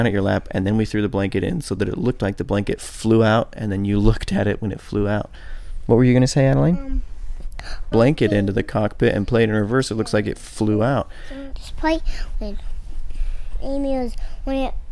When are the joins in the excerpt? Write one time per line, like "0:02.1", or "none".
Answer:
0:07.9
0:11.5